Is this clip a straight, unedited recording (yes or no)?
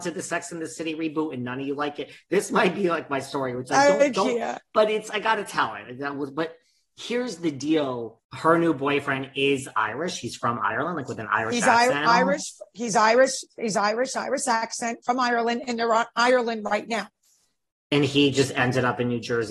yes